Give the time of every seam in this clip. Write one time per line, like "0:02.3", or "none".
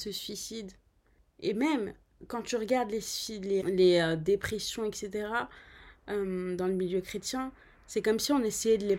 0:03.6